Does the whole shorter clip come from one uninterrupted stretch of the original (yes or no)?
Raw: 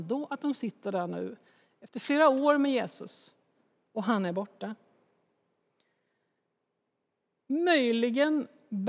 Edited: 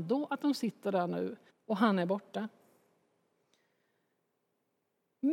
no